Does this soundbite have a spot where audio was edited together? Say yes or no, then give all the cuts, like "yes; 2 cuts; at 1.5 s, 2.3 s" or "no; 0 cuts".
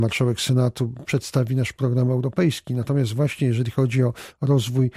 no; 0 cuts